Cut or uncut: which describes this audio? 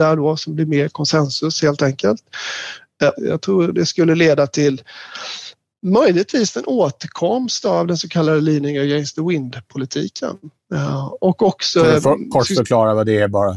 cut